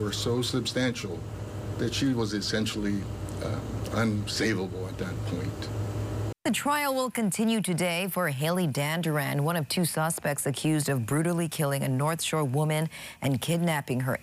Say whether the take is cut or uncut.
cut